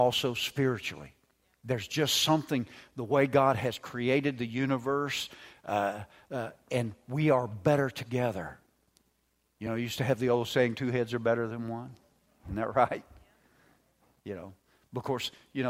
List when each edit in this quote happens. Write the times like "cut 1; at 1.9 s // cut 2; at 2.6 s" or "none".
none